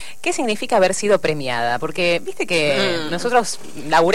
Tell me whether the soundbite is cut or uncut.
uncut